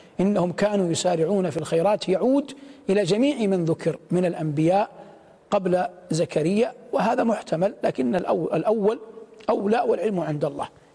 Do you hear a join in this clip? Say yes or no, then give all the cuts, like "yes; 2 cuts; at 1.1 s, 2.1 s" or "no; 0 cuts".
no; 0 cuts